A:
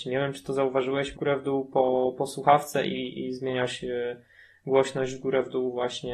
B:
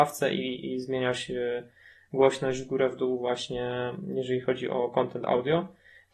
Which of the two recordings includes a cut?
A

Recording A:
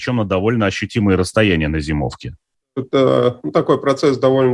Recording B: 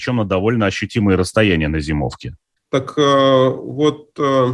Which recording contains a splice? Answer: B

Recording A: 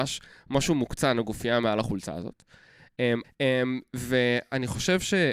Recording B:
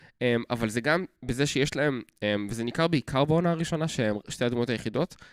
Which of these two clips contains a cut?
A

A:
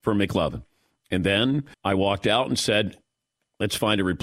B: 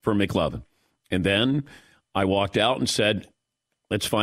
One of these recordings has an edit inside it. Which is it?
A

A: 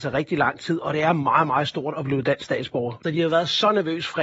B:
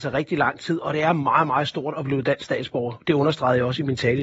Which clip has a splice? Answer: A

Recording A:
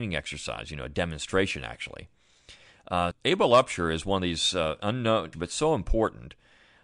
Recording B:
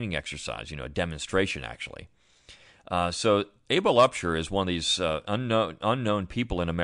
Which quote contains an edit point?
A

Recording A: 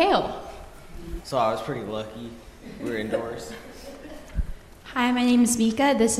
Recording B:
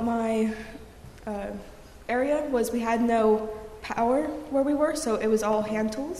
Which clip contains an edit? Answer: A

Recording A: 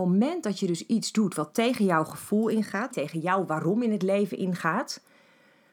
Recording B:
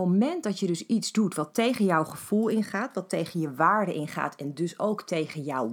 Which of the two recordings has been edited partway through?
A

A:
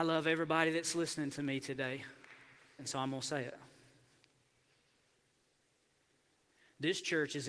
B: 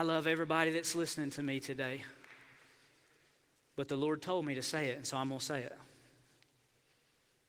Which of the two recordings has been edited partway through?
A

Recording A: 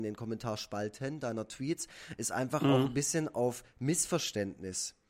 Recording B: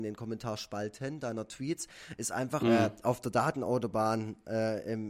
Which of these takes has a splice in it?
B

